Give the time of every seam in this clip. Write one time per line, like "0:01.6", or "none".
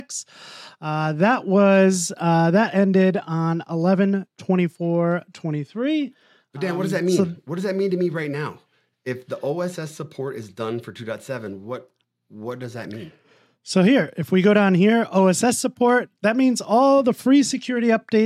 none